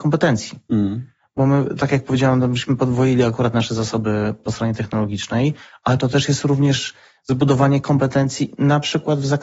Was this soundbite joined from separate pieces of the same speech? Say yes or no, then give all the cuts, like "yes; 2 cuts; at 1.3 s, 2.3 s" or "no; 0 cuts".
yes; 1 cut; at 4.4 s